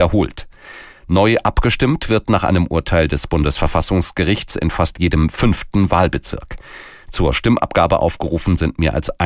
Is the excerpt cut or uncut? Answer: uncut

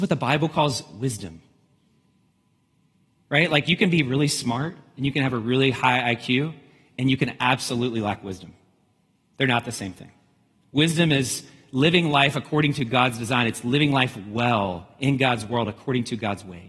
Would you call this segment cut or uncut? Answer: uncut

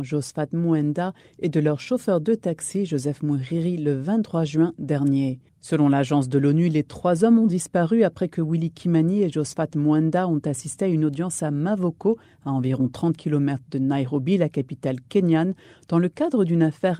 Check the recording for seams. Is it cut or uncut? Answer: uncut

